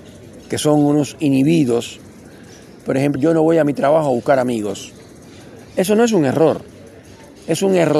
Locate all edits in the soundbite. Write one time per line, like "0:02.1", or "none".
0:03.2